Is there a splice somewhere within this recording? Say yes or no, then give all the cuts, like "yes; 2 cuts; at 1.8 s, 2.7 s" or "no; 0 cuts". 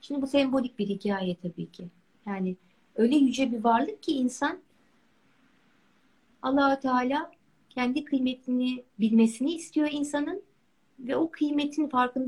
yes; 2 cuts; at 2.1 s, 8.9 s